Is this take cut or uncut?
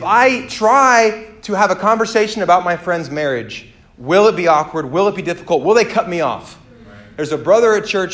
uncut